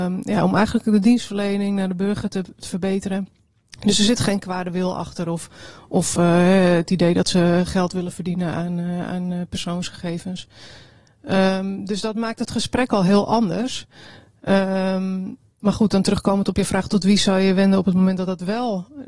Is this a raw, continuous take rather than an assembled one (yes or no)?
yes